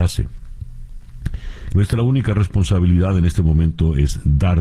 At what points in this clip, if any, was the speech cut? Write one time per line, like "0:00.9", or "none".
0:01.7

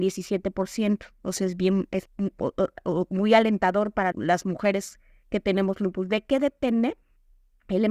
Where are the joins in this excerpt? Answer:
0:04.1

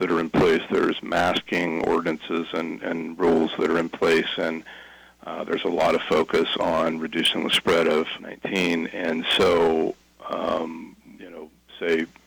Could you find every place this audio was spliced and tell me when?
0:08.2
0:11.2

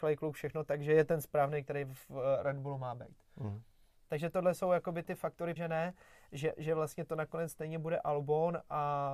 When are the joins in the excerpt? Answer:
0:05.6

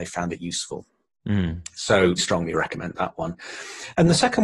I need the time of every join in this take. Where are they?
0:02.2

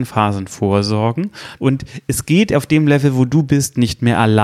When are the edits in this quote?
0:01.6

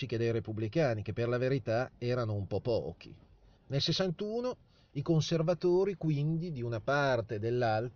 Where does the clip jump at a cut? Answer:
0:03.5

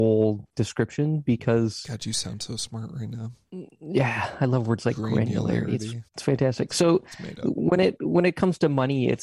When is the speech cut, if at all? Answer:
0:06.1

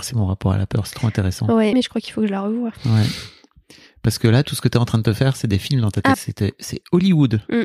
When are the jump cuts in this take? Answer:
0:01.7
0:06.1

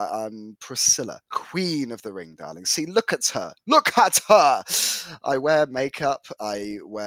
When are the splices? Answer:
none

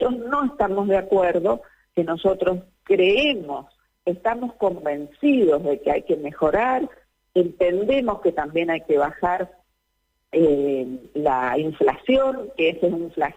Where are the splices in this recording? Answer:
none

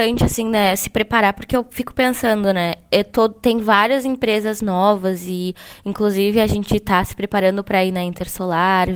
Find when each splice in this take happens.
none

